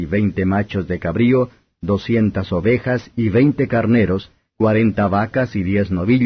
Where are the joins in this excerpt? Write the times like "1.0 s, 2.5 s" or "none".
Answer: 4.5 s